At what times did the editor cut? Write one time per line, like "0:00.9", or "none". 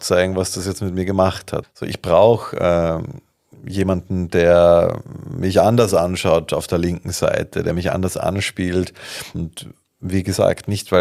0:01.6
0:09.3

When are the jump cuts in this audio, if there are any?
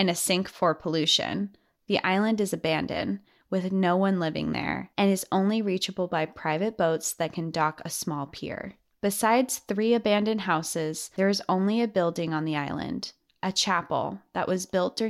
none

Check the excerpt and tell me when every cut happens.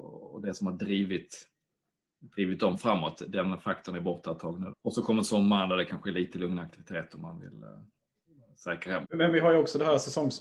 0:04.7
0:09.0

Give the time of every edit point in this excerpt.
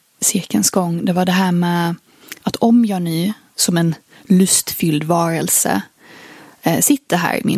0:03.5

